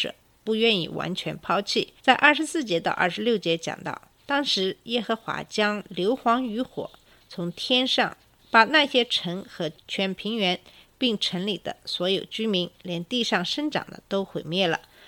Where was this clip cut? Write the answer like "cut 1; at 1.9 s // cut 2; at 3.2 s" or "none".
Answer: cut 1; at 2.0 s // cut 2; at 8.4 s